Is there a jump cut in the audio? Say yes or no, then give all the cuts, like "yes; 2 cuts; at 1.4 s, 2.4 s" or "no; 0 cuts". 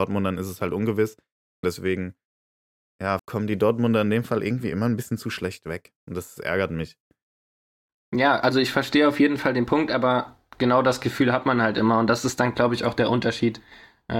yes; 2 cuts; at 1.6 s, 3.2 s